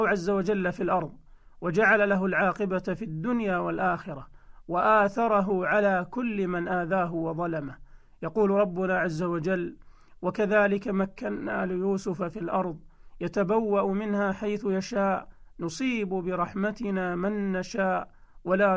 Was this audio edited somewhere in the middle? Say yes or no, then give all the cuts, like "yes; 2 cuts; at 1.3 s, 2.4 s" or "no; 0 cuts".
no; 0 cuts